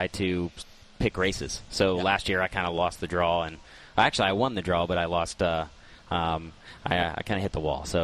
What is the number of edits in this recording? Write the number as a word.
zero